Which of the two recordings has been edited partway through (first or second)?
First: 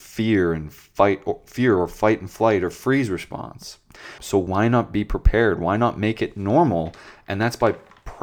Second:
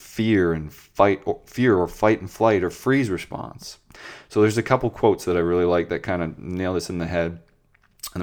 first